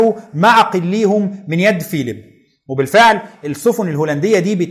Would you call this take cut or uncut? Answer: uncut